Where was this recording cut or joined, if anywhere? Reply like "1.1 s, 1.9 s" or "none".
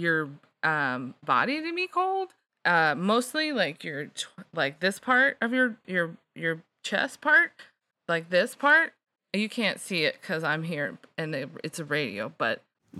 none

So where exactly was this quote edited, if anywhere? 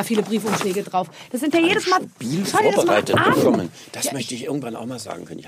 none

